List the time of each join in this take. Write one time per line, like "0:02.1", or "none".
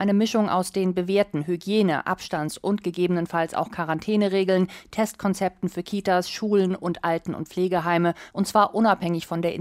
0:08.3